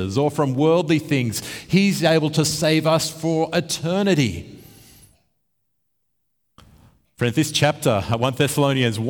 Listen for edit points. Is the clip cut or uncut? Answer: uncut